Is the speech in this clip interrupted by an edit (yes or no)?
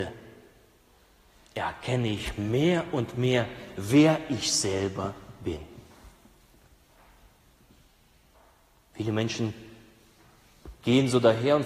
no